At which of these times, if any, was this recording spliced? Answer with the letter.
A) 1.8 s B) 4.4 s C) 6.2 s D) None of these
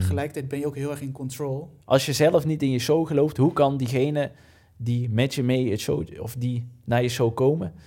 A